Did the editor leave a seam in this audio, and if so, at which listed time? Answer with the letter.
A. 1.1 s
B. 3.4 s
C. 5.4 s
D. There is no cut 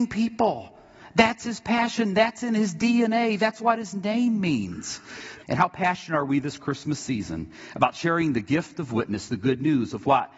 C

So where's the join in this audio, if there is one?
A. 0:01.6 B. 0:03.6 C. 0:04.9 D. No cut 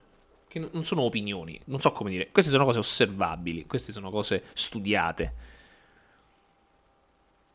A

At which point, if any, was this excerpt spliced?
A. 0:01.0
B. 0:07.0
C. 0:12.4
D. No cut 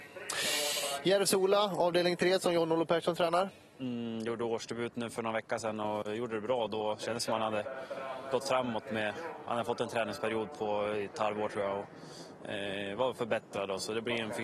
D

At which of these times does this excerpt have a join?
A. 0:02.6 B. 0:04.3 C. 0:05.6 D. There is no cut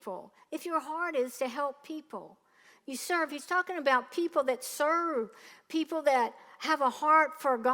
D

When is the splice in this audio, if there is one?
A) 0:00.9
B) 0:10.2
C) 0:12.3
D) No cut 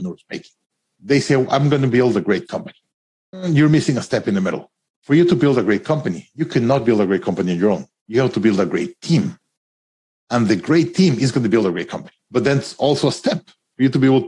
C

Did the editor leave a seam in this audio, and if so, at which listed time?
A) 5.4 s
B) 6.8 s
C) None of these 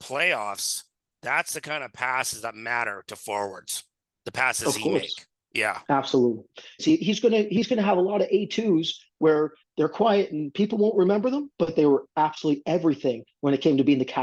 B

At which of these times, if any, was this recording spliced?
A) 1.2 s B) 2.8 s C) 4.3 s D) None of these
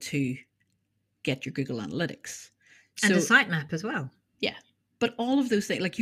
C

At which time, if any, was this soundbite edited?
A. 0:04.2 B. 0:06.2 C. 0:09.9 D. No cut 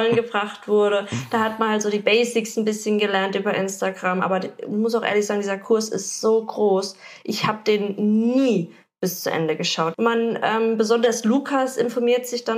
C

